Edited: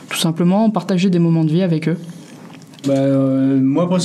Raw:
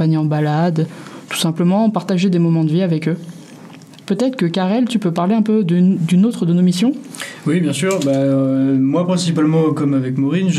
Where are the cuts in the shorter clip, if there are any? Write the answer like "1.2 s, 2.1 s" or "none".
2.8 s